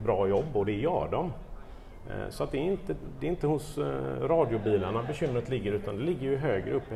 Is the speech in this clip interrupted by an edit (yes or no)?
no